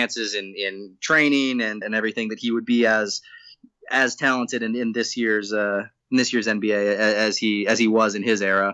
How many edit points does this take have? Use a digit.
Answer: 1